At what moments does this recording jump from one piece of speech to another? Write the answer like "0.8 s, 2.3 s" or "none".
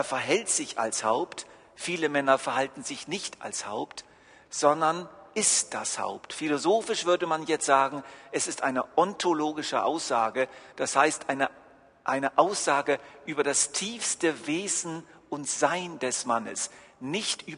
5.3 s